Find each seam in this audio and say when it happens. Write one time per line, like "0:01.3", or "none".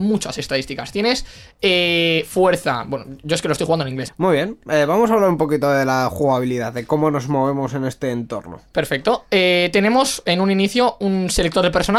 0:04.1